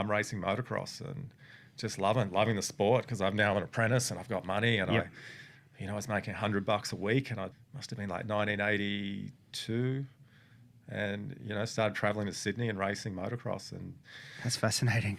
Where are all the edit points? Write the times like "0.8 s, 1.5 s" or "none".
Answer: 7.5 s